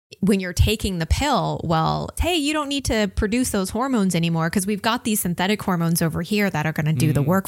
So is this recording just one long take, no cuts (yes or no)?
no